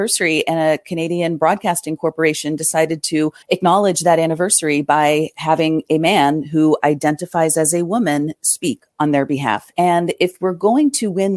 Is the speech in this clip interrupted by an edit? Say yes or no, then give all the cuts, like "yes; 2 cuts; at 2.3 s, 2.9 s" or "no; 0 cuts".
yes; 2 cuts; at 3.4 s, 9.7 s